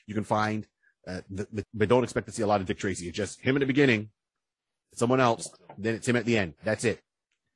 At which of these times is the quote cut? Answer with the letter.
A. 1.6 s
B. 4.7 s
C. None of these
A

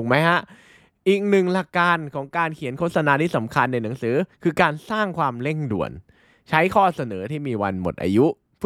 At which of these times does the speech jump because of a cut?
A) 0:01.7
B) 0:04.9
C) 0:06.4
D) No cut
A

